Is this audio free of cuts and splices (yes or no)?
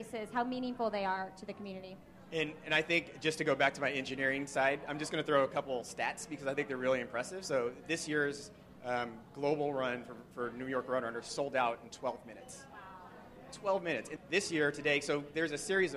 no